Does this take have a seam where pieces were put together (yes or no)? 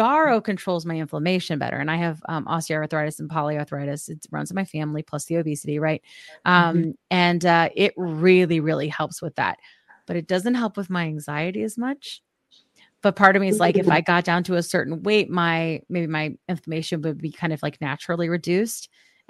no